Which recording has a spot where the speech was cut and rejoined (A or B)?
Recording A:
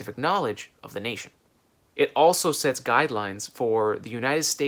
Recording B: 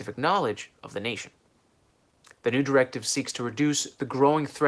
A